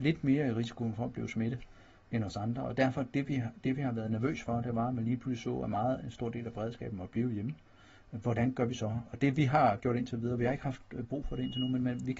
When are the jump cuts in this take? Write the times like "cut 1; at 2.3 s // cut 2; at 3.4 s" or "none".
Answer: none